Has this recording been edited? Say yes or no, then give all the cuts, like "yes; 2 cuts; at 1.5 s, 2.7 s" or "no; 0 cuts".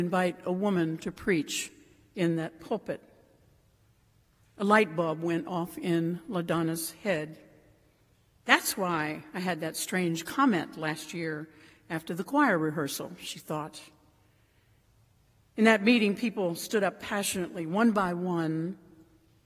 no; 0 cuts